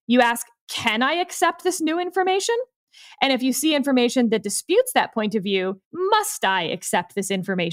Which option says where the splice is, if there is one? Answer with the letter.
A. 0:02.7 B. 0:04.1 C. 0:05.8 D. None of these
C